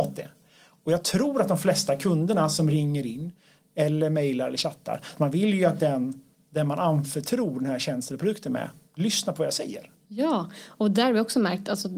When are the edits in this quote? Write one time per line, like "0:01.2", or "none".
0:05.2